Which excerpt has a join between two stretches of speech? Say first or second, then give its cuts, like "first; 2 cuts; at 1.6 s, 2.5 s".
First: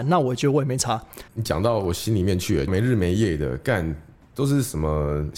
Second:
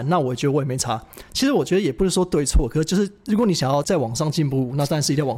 first; 2 cuts; at 1.3 s, 2.7 s